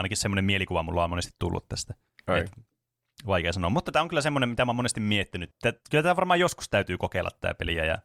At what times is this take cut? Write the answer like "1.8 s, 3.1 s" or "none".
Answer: 5.5 s

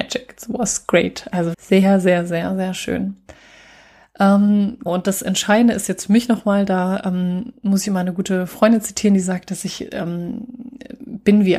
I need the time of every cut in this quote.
1.5 s, 4.9 s

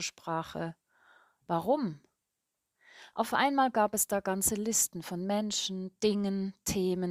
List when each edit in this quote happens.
3.1 s

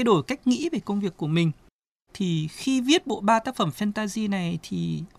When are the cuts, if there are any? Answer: 2.1 s

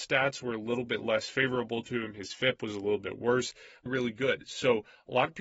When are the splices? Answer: 3.9 s

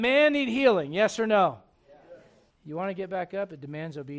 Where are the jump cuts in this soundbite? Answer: 2.5 s

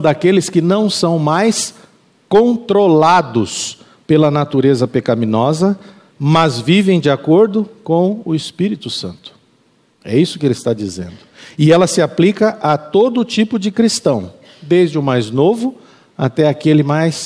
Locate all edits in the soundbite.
none

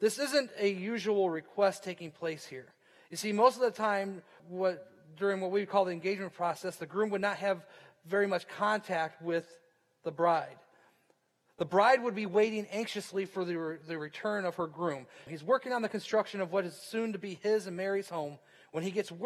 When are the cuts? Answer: 4.4 s, 15.3 s

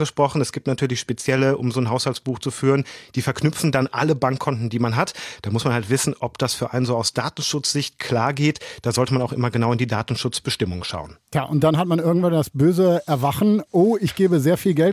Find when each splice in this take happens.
none

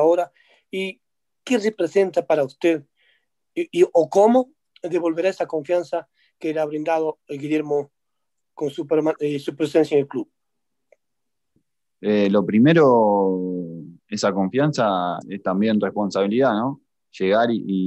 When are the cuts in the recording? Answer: 15.2 s

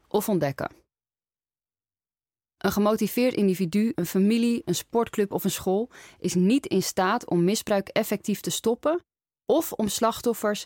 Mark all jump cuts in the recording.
3.9 s

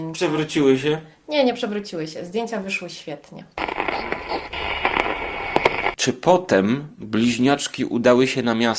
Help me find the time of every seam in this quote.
none

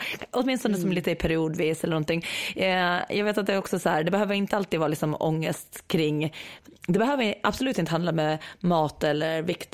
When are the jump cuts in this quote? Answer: none

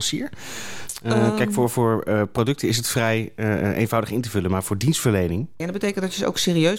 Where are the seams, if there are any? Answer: 5.6 s

